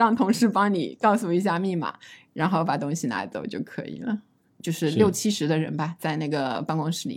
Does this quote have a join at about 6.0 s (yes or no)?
no